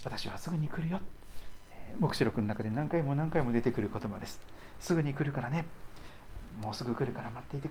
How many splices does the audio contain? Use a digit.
0